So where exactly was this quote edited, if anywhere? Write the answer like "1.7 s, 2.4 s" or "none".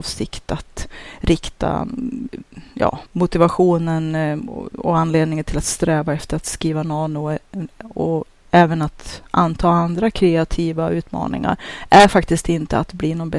3.1 s